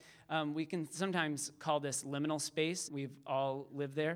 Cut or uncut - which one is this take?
cut